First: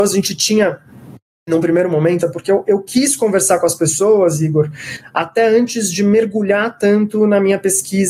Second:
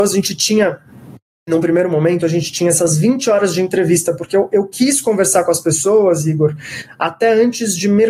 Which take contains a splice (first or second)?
first